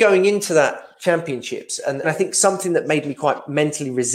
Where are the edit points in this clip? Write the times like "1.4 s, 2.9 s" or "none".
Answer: 2.0 s